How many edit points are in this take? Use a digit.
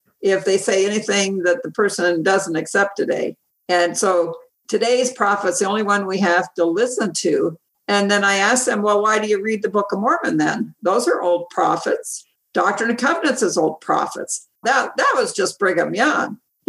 1